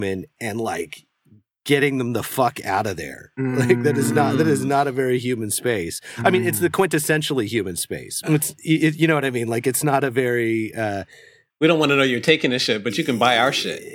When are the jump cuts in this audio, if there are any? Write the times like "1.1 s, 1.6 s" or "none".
8.2 s